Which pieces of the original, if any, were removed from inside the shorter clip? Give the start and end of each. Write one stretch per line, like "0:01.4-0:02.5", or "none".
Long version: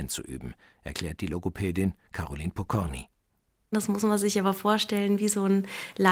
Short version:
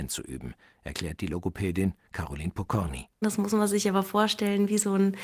0:03.2-0:03.7